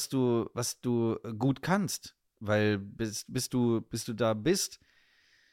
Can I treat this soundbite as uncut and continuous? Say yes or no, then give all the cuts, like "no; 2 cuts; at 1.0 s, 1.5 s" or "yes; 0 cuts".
yes; 0 cuts